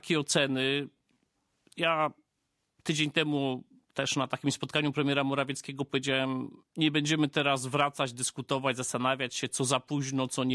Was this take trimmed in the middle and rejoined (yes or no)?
no